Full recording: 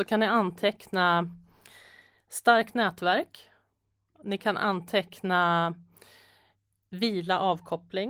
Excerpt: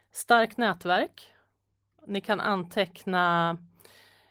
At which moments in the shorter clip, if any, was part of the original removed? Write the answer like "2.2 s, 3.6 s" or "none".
none